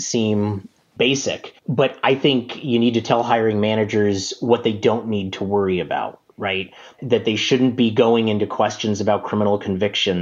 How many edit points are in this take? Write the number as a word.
one